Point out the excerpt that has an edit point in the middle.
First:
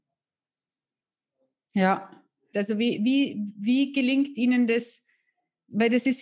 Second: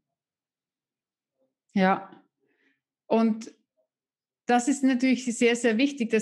first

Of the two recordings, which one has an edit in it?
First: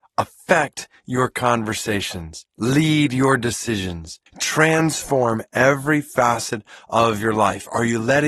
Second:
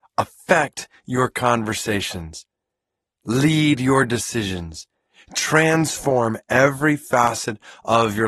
first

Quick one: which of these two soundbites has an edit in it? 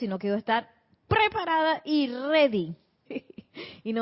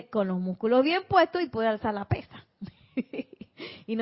first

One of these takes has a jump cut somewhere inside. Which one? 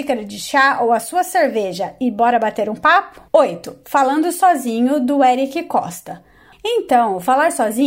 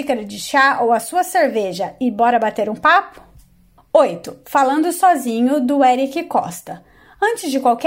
first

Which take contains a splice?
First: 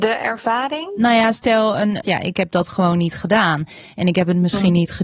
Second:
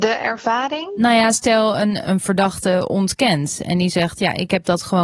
first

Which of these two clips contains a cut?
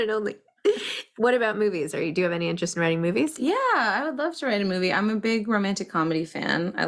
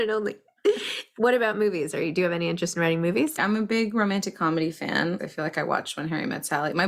second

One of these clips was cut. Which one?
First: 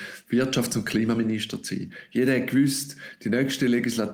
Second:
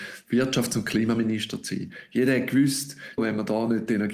second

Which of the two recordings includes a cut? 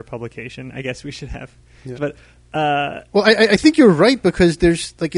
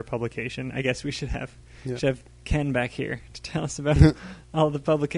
first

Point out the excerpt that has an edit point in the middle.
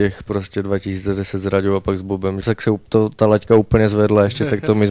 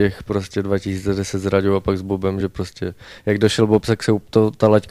first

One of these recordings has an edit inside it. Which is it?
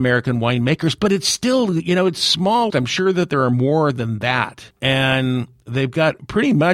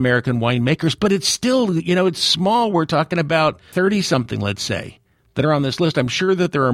first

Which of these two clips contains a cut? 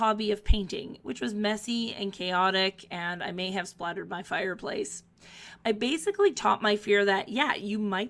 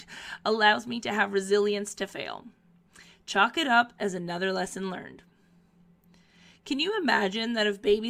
first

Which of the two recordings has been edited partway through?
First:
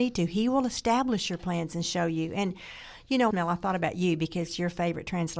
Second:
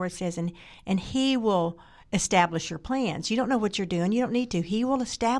first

